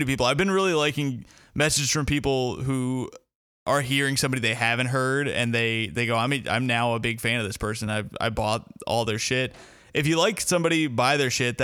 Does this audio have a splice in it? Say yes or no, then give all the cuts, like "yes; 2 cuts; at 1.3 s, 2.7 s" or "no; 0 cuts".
no; 0 cuts